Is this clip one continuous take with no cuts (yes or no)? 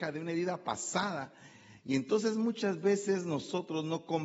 yes